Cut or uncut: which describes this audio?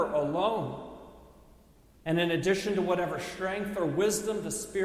cut